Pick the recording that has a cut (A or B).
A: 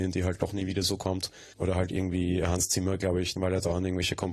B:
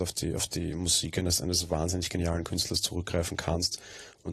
A